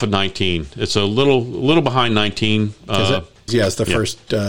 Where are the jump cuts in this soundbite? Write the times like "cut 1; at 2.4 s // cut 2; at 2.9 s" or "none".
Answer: cut 1; at 3.5 s